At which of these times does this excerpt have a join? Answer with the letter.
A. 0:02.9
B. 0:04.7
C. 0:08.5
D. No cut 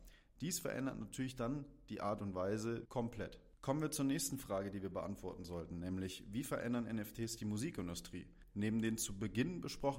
A